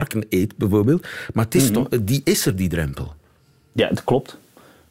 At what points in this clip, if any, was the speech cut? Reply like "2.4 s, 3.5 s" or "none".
none